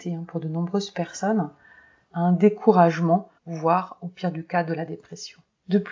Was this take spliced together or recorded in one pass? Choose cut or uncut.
cut